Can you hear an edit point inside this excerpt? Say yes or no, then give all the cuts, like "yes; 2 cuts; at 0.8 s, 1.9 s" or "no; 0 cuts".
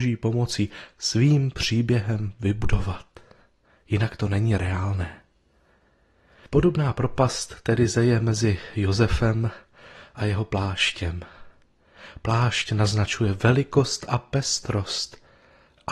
no; 0 cuts